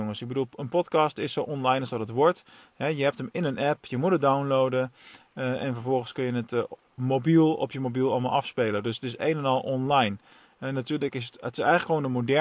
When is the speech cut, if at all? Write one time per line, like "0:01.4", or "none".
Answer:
none